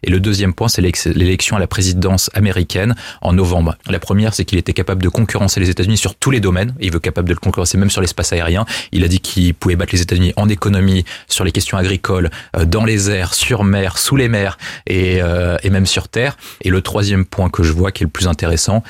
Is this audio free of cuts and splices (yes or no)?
no